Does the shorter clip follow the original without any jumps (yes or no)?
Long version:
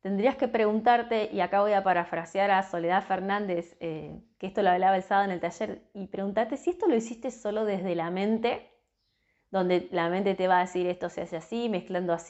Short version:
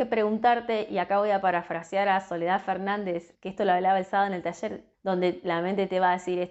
no